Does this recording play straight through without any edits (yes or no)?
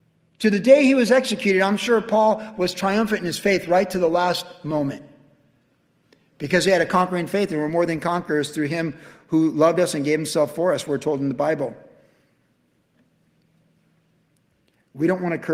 yes